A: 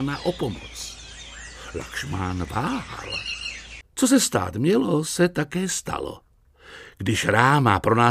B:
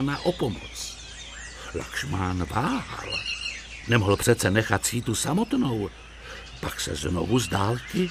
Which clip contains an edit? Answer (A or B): A